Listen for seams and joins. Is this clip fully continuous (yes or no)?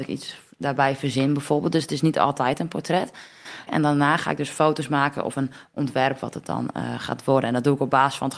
no